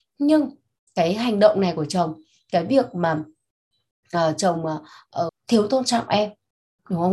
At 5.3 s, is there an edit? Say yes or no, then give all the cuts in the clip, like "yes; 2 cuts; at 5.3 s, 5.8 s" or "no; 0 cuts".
yes; 1 cut; at 5.3 s